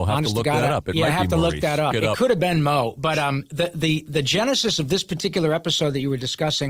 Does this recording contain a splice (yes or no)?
yes